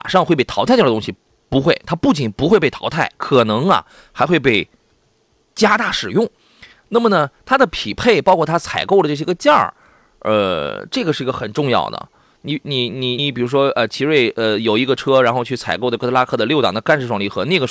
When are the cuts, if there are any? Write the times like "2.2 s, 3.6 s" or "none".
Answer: 13.2 s